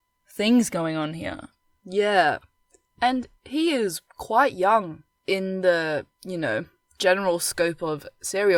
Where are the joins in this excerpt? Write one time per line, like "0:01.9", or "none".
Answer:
none